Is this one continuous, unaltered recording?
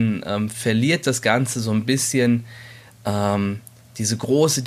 yes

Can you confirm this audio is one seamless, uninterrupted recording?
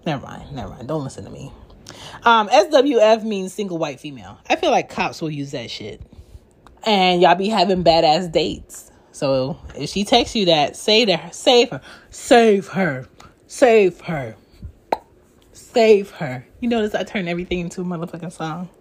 no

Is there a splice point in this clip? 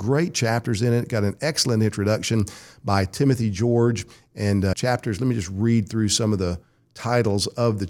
yes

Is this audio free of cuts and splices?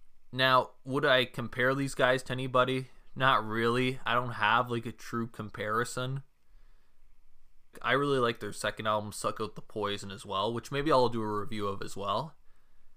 no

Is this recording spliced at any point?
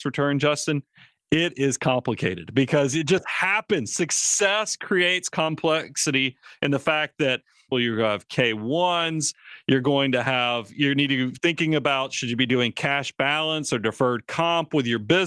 yes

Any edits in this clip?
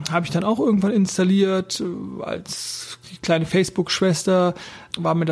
no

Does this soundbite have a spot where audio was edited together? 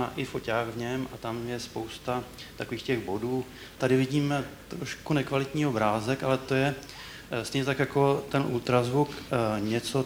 yes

